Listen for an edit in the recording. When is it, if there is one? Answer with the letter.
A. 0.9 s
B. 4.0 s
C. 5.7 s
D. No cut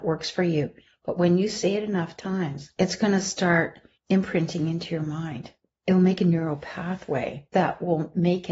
B